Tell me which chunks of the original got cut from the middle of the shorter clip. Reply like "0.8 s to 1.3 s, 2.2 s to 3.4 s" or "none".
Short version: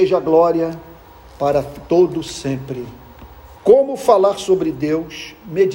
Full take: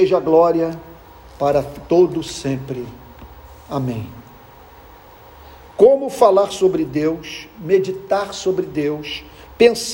3.6 s to 5.7 s